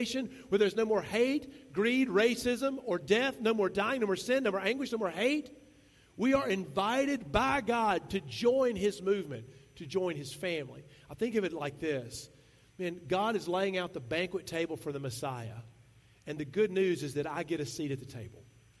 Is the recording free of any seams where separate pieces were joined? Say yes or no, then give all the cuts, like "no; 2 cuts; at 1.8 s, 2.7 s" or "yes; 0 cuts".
yes; 0 cuts